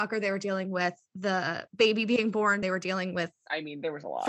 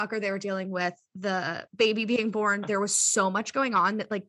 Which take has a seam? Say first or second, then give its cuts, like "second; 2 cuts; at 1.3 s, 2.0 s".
second; 1 cut; at 2.6 s